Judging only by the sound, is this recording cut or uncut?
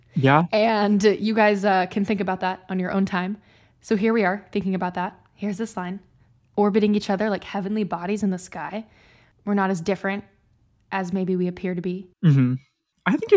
cut